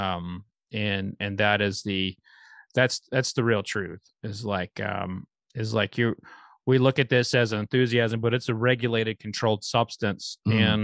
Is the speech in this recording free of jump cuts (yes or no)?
yes